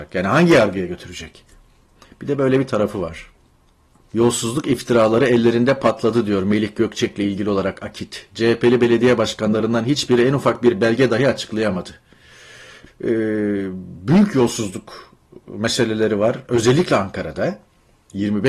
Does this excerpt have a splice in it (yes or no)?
yes